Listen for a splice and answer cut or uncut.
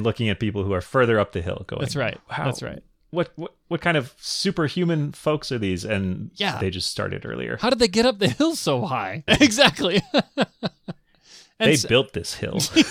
cut